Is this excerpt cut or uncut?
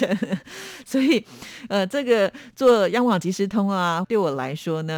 cut